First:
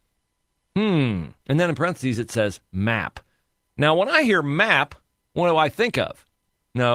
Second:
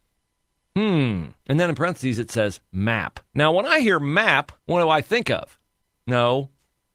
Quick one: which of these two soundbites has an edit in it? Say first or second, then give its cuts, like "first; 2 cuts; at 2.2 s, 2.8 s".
second; 2 cuts; at 3.2 s, 4.6 s